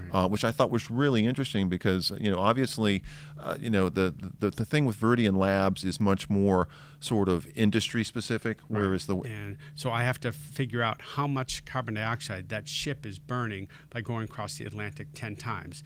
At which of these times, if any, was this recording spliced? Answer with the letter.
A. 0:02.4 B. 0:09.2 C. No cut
B